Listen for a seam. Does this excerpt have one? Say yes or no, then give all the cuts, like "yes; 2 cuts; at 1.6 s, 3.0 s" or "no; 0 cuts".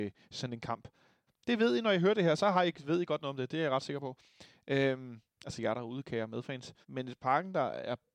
yes; 2 cuts; at 1.3 s, 6.8 s